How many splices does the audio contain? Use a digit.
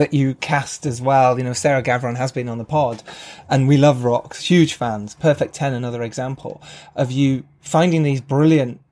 0